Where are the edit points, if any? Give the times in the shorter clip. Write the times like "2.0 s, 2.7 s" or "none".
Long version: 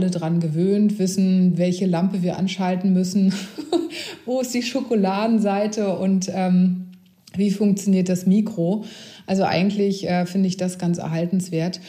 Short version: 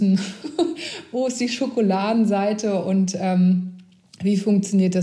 none